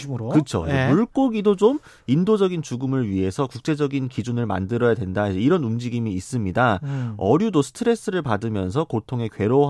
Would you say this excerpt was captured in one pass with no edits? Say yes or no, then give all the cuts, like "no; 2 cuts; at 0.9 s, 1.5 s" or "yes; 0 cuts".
yes; 0 cuts